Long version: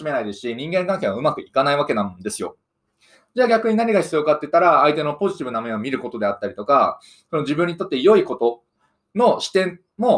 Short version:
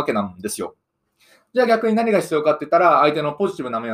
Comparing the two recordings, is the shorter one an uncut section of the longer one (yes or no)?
yes